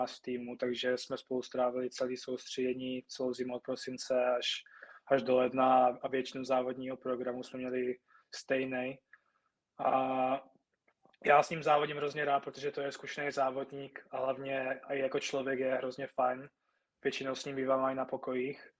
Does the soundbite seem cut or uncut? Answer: uncut